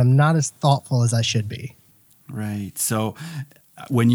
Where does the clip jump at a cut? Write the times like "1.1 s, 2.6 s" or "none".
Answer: none